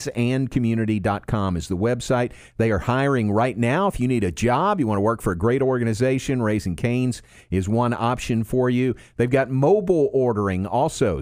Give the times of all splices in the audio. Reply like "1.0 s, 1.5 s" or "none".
none